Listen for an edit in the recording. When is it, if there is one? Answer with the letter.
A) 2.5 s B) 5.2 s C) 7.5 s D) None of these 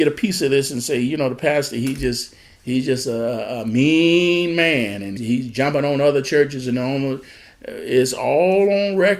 B